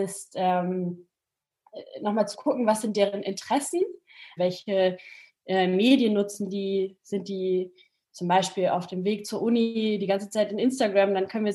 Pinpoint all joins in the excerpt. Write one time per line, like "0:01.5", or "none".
0:04.4